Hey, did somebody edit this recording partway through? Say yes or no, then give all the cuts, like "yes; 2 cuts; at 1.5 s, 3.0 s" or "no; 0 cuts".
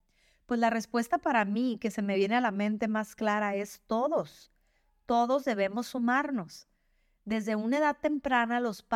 no; 0 cuts